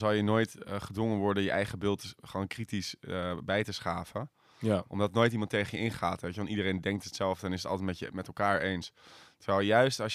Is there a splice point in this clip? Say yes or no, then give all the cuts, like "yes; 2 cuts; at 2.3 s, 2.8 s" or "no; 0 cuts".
no; 0 cuts